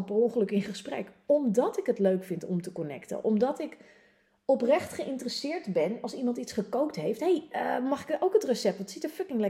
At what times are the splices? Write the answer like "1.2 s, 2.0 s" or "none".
none